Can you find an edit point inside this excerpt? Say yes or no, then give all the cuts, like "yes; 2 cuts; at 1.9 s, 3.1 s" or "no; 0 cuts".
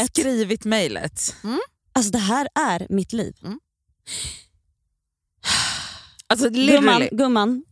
no; 0 cuts